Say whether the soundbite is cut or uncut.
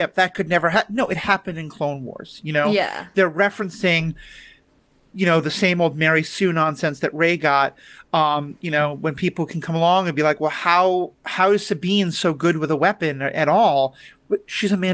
uncut